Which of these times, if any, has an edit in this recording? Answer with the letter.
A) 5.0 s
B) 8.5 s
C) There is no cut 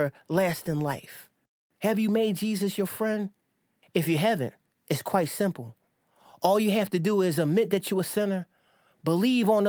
C